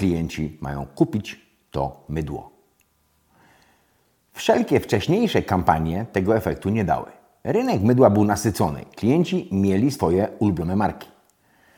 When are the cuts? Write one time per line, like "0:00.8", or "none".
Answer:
none